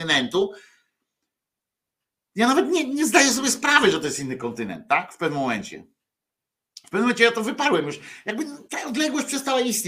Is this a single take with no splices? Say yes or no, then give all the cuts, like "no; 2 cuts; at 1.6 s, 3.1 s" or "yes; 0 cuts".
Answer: no; 1 cut; at 8.7 s